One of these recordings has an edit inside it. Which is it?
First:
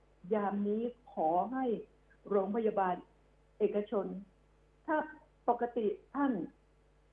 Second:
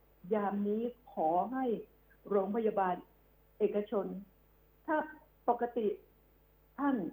first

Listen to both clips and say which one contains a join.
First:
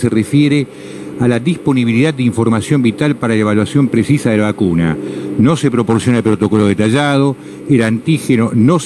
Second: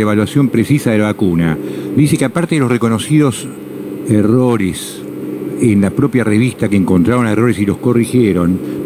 second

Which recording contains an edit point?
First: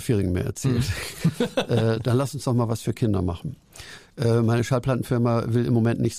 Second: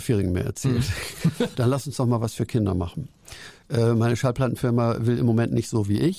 second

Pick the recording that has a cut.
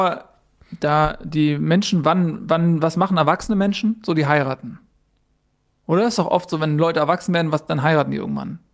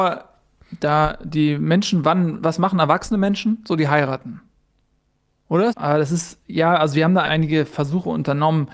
second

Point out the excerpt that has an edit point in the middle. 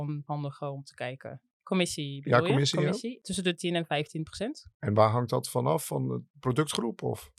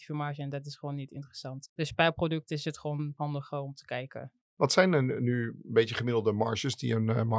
first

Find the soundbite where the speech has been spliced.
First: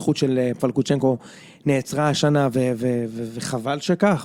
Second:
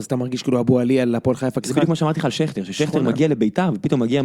second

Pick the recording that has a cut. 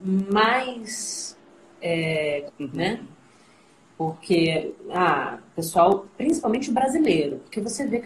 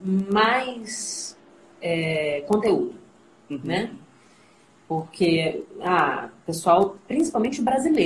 first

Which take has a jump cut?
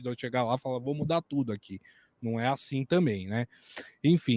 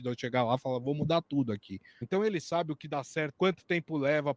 second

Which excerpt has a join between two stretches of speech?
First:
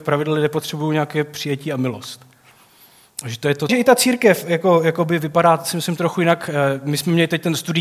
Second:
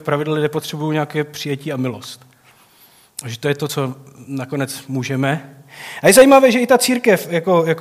first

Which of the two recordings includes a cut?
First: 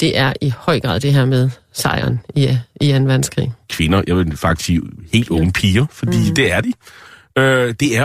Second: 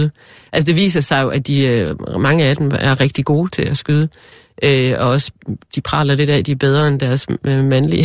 first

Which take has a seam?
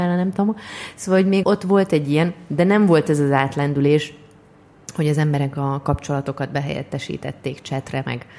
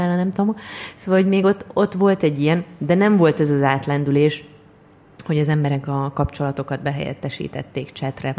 first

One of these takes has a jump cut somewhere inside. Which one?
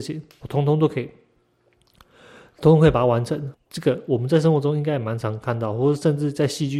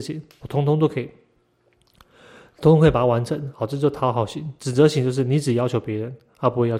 first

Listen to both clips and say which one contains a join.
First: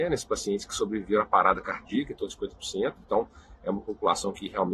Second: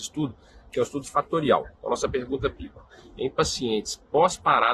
second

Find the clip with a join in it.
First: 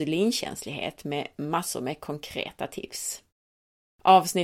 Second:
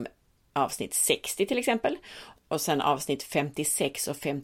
second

